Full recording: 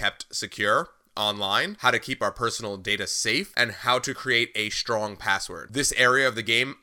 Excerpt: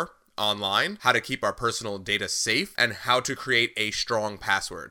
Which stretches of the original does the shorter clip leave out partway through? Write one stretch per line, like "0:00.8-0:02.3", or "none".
none

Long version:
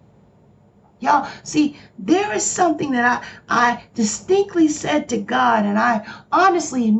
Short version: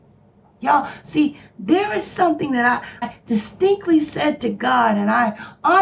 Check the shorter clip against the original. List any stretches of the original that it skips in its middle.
0:03.4-0:03.7

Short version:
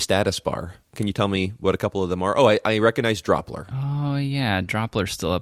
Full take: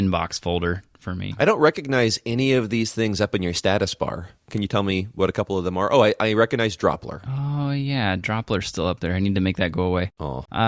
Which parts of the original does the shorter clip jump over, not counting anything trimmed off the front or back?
none

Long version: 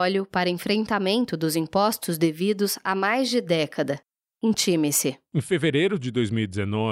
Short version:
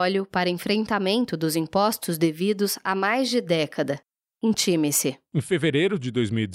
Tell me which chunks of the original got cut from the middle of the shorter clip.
none

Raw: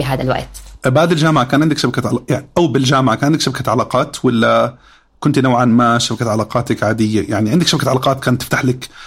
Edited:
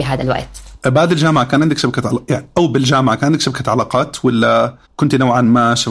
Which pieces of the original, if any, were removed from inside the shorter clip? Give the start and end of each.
0:04.8-0:05.1

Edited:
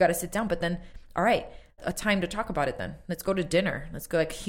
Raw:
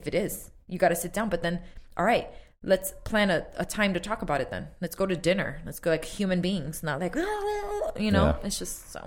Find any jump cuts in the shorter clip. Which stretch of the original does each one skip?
0:02.6-0:03.5

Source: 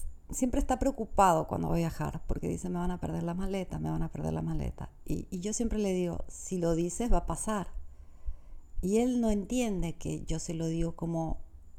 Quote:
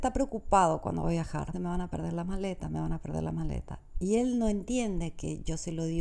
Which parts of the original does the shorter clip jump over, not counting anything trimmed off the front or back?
0:02.2-0:02.6
0:05.0-0:08.8

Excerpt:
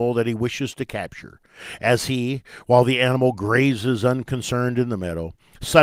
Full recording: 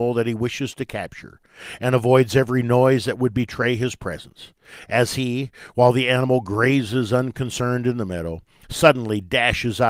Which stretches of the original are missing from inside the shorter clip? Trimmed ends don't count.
0:01.8-0:04.9

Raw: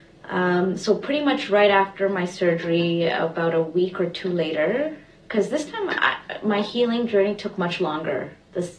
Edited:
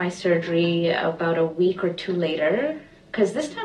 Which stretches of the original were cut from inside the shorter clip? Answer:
none

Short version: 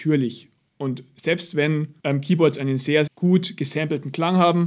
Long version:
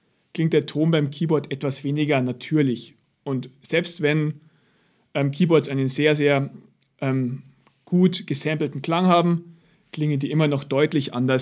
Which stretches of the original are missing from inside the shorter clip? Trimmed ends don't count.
0:04.5-0:05.1
0:06.2-0:07.8

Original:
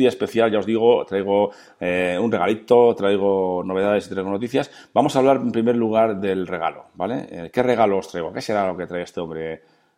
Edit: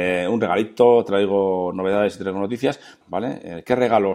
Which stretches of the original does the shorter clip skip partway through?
0:04.9-0:06.9

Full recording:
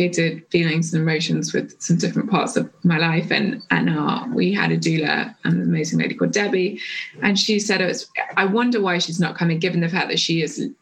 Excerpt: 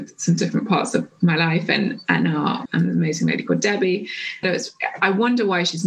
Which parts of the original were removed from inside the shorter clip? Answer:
0:04.3-0:05.4
0:07.1-0:07.8

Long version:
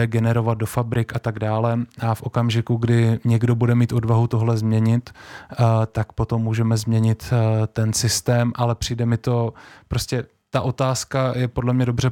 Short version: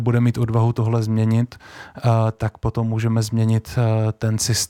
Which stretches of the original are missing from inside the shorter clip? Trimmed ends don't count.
none

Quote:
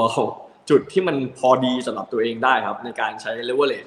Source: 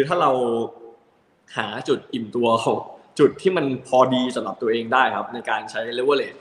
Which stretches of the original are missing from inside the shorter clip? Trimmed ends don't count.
none

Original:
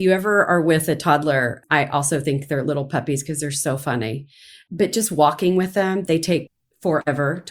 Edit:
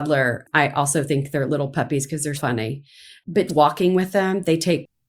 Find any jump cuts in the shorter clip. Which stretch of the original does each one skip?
0:03.5-0:03.8
0:04.9-0:05.1

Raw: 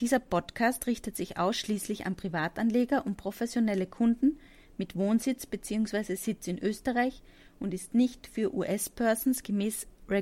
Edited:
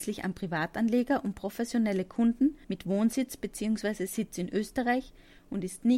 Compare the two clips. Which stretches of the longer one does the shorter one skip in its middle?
0:04.5-0:04.7

